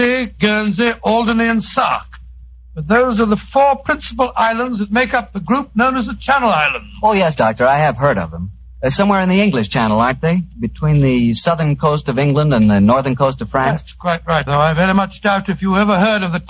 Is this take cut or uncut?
cut